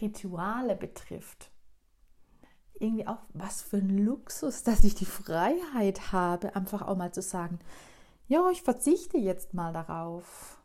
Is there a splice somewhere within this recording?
yes; 1 cut; at 2.7 s

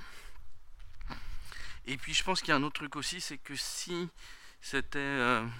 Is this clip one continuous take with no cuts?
yes; 0 cuts

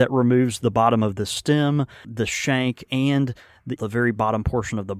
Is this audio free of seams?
no; 2 cuts; at 2.0 s, 3.8 s

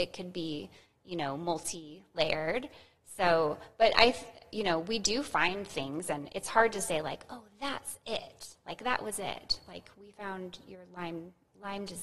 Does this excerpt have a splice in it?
no; 0 cuts

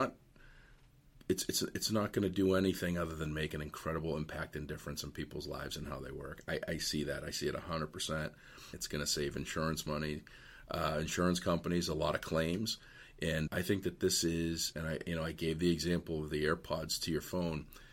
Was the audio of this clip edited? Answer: yes; 3 cuts; at 8.7 s, 13.5 s, 14.7 s

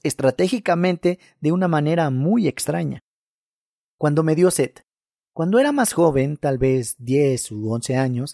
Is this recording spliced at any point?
no; 0 cuts

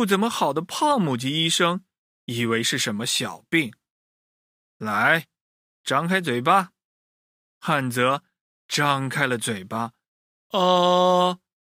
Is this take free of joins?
yes; 0 cuts

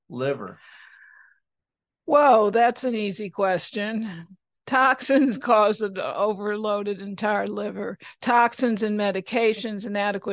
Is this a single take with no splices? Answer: yes; 0 cuts

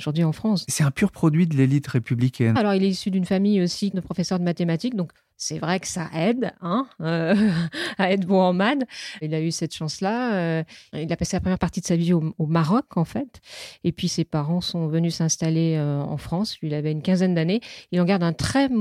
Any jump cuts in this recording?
yes; 1 cut; at 2.6 s

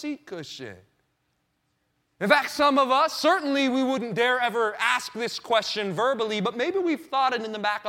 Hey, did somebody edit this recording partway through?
no; 0 cuts

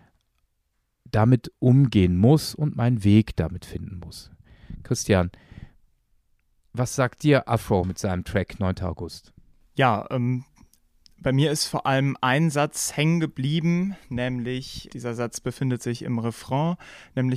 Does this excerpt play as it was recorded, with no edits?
no; 1 cut; at 14.9 s

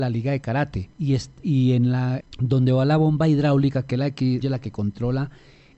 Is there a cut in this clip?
yes; 3 cuts; at 0.9 s, 2.2 s, 4.4 s

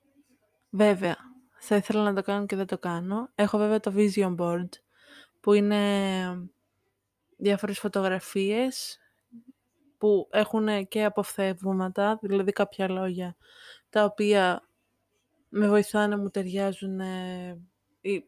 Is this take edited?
no; 0 cuts

